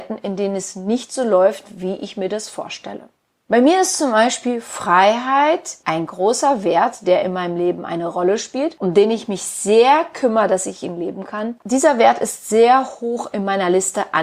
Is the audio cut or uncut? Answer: cut